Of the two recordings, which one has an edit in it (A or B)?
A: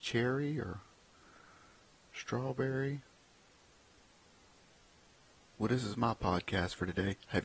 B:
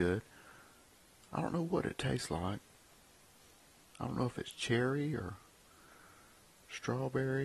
A